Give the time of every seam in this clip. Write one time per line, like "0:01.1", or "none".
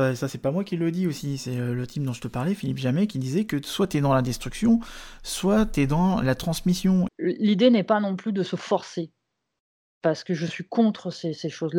0:07.1